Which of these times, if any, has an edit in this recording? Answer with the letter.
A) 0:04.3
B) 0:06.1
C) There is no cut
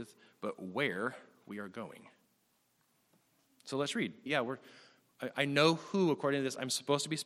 A